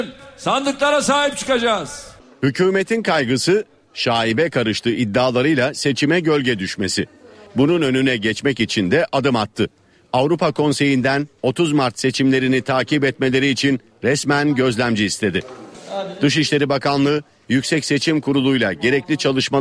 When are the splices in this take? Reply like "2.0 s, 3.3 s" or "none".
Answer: none